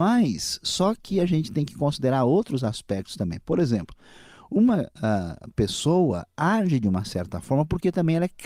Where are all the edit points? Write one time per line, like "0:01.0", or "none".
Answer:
none